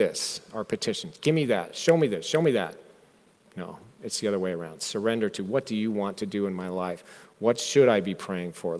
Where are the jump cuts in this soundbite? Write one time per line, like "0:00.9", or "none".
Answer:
none